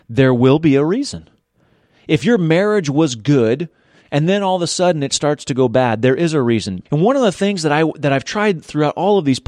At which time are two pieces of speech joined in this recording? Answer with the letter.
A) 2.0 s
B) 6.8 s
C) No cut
B